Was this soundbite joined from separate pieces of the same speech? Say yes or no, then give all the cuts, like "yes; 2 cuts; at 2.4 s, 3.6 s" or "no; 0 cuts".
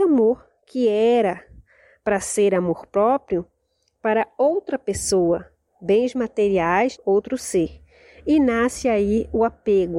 yes; 1 cut; at 7.0 s